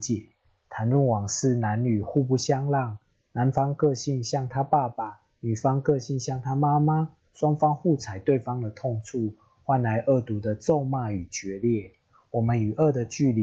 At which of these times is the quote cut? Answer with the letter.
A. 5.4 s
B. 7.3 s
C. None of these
C